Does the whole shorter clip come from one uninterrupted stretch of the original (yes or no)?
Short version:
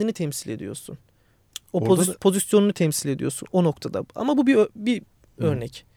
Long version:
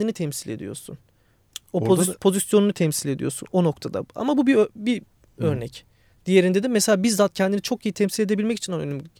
yes